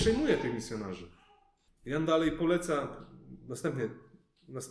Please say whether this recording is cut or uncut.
cut